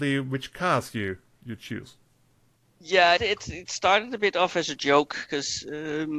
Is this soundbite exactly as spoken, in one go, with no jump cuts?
no; 1 cut; at 3.2 s

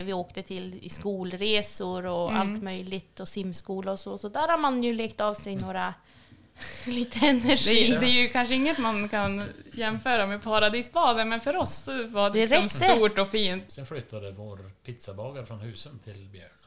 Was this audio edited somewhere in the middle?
yes; 2 cuts; at 12.3 s, 13.7 s

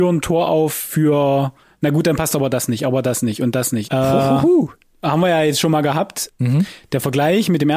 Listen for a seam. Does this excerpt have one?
yes; 2 cuts; at 3.9 s, 6.3 s

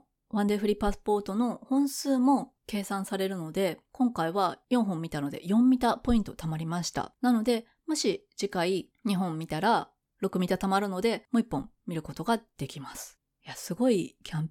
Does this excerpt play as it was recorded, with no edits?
yes; 0 cuts

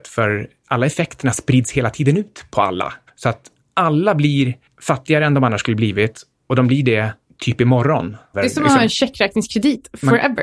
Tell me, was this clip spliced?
yes; 2 cuts; at 3.1 s, 8.3 s

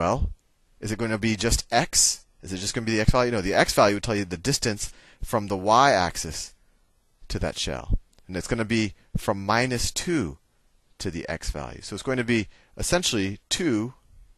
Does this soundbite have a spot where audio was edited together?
no; 0 cuts

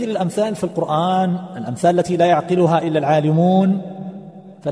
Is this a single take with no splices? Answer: yes; 0 cuts

